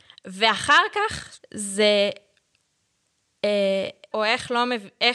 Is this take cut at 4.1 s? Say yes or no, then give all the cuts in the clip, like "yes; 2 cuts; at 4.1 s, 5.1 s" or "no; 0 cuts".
yes; 2 cuts; at 1.4 s, 4.1 s